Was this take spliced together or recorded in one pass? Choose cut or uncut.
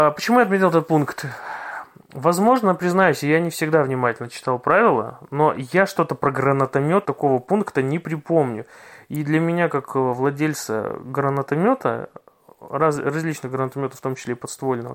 cut